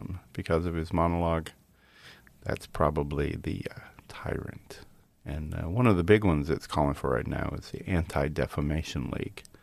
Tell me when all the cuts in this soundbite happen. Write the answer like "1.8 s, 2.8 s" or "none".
none